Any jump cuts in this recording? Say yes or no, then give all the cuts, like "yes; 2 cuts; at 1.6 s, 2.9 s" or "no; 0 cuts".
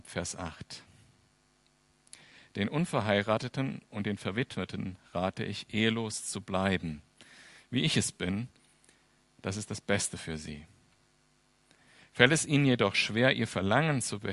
no; 0 cuts